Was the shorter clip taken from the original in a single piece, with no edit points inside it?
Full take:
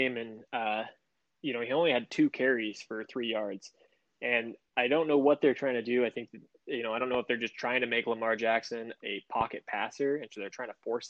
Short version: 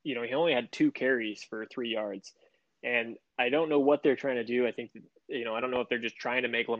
yes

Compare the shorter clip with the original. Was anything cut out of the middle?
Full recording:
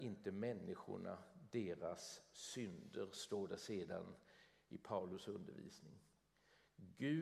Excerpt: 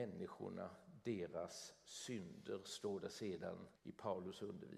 yes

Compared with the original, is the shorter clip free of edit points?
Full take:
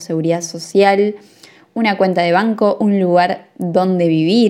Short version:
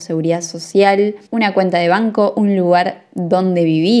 no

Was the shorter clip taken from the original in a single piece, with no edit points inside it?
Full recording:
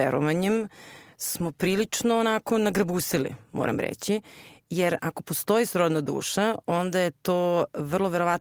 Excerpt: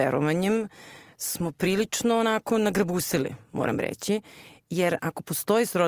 yes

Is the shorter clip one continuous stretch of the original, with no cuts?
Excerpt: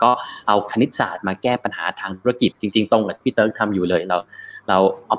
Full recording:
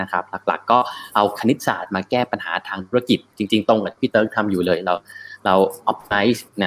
no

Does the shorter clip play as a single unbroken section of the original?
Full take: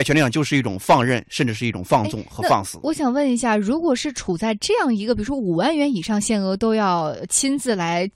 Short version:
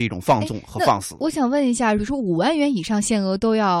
no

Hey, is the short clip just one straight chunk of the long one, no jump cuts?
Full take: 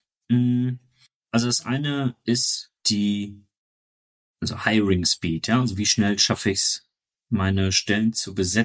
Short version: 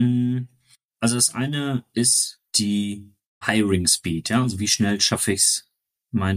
no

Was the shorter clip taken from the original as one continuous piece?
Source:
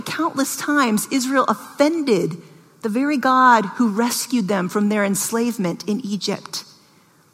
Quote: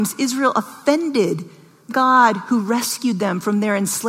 no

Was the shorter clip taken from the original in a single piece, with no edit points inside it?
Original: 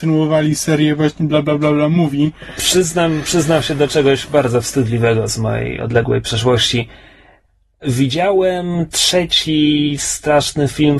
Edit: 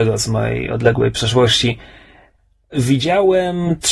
yes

